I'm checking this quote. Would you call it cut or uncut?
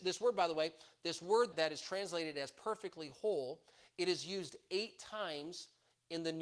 cut